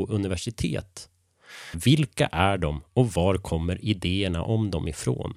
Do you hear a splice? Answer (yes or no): yes